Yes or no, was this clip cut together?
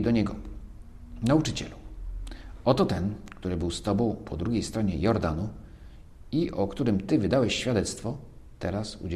no